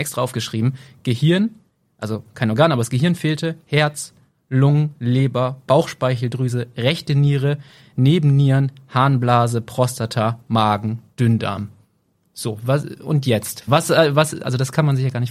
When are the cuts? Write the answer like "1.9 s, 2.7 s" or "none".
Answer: 13.7 s